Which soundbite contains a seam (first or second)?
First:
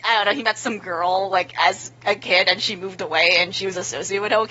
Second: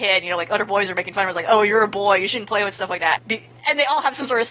second